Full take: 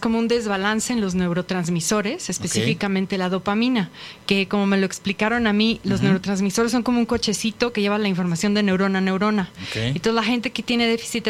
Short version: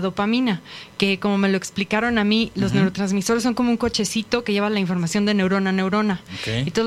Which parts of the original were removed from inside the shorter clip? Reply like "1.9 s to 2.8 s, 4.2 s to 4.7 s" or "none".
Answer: none

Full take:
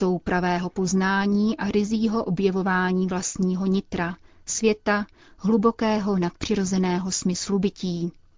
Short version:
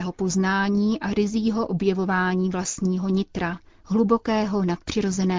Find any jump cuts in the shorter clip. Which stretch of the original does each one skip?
4.4 s to 5.3 s

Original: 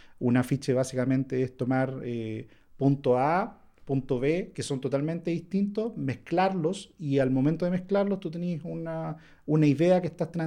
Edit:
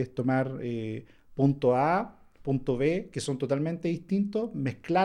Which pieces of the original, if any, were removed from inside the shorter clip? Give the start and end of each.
none

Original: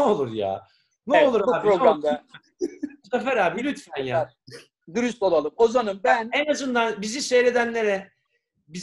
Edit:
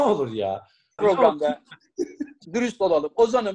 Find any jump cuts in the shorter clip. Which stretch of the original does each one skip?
1.0 s to 1.6 s, 3.1 s to 4.9 s

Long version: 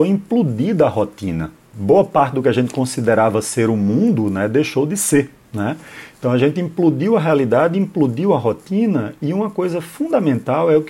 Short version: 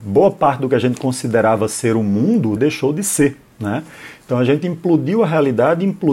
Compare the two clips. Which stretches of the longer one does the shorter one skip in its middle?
4.3 s to 4.5 s

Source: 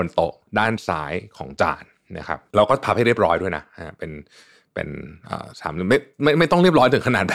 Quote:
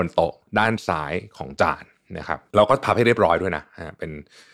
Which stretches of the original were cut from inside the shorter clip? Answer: none

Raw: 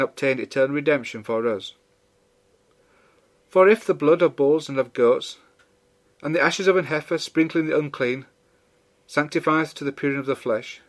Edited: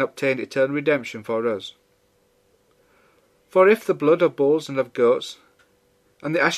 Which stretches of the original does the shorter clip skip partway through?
none

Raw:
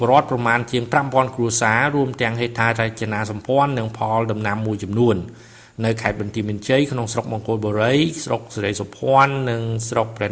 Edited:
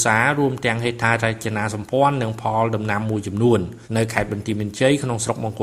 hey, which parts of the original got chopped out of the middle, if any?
5.4 s to 5.7 s

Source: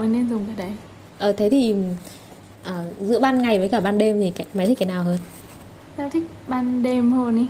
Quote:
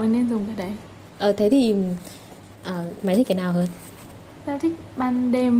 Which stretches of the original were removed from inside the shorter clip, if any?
3.0 s to 4.5 s

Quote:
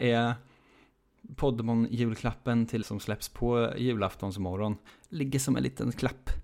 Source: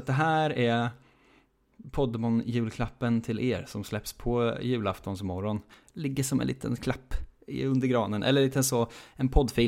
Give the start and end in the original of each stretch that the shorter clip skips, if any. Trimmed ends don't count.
3.4 s to 3.7 s

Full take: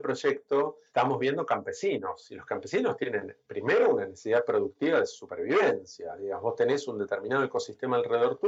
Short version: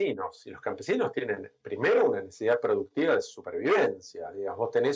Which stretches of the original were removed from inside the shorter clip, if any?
none

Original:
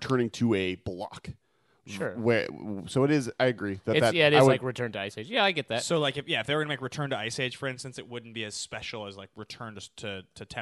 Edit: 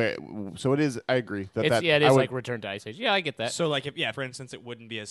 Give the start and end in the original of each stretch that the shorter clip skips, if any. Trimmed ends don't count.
6.4 s to 7.6 s

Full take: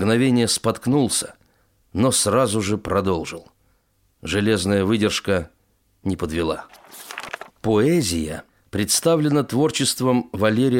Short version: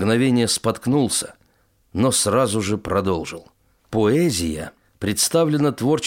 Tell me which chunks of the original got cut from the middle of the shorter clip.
3.8 s to 7.5 s

